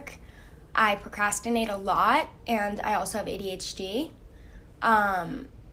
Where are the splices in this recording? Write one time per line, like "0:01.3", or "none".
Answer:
none